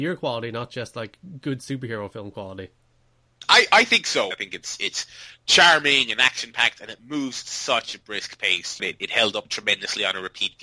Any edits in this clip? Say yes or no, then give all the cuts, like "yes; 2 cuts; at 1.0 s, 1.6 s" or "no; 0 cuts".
yes; 2 cuts; at 4.3 s, 8.8 s